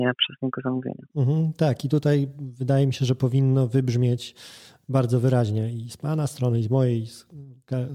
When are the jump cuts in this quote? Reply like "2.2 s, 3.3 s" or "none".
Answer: 1.1 s

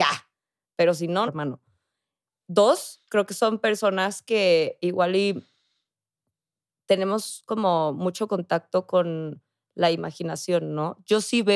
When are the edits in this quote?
1.3 s

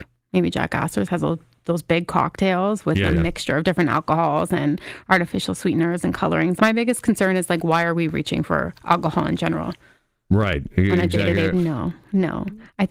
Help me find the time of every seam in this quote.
6.6 s, 11.5 s

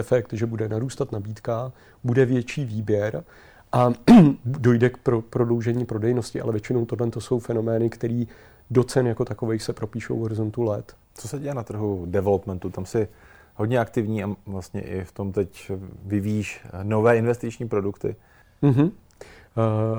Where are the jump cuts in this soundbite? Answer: 11.0 s

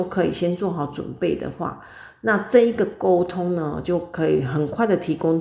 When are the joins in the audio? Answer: none

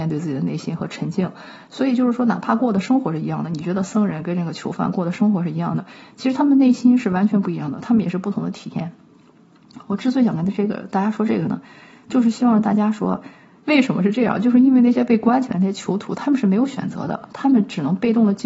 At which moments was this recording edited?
13.6 s

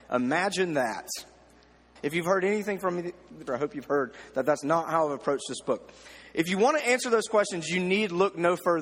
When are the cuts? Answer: 2.0 s, 3.5 s

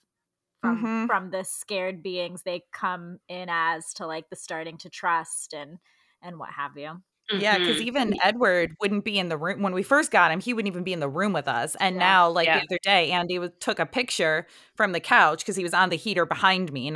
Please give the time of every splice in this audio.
none

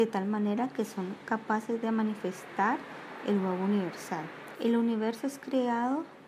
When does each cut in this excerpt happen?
4.6 s

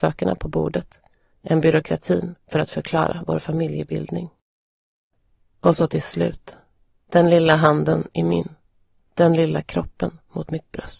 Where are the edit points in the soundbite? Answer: none

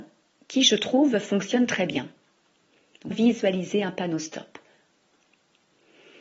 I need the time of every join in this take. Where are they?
3.1 s

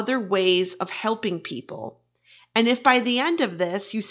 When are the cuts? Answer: none

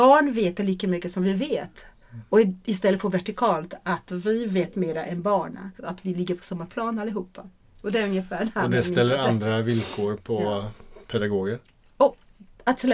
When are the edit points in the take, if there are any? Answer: 5.8 s

